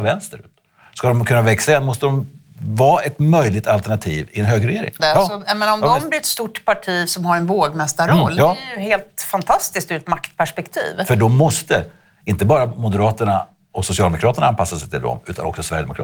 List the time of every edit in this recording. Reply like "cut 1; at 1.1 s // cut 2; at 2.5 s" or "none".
cut 1; at 5.0 s

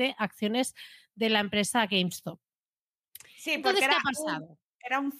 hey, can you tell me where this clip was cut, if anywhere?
none

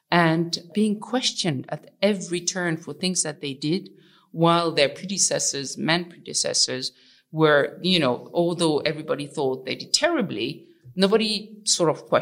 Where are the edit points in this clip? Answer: none

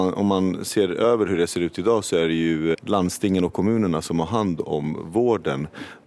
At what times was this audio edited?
cut 1; at 2.7 s

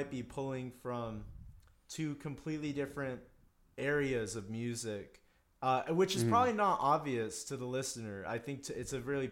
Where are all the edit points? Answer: none

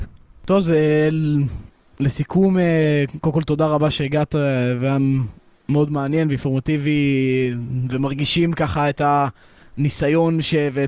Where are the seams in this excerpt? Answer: none

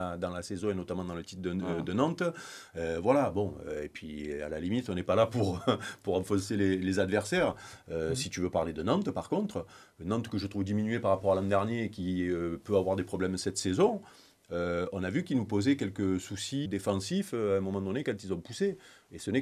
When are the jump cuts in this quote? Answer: cut 1; at 16.7 s

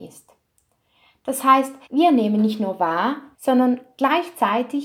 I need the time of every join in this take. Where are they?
cut 1; at 1.8 s // cut 2; at 3.3 s

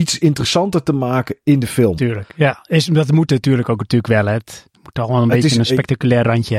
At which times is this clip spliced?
none

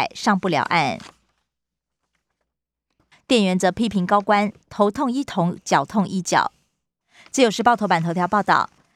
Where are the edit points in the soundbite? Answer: cut 1; at 3.1 s // cut 2; at 7.0 s

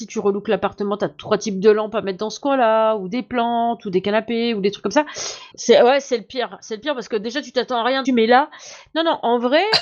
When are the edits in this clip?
cut 1; at 5.5 s // cut 2; at 8.0 s

